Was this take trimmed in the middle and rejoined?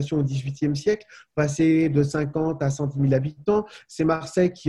no; 0 cuts

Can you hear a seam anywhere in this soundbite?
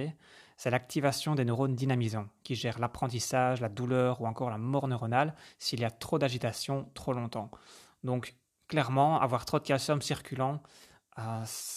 no; 0 cuts

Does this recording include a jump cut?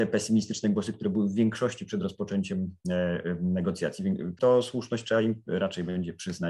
yes; 1 cut; at 4.4 s

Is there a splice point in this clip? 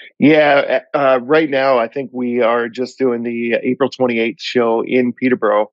no; 0 cuts

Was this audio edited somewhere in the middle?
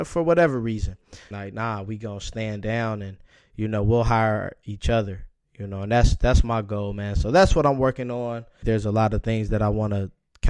yes; 2 cuts; at 1.3 s, 8.6 s

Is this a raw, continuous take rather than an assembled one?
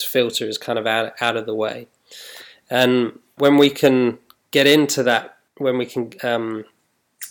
no; 2 cuts; at 3.4 s, 5.5 s

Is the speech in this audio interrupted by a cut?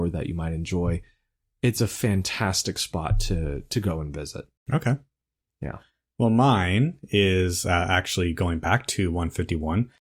no; 0 cuts

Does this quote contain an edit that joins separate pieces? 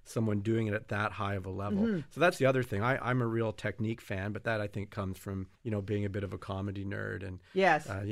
yes; 1 cut; at 5.5 s

